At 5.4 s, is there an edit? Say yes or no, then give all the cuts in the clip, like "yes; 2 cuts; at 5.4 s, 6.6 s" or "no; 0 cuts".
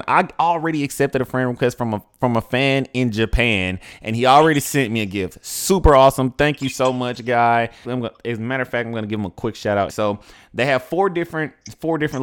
no; 2 cuts; at 7.8 s, 9.9 s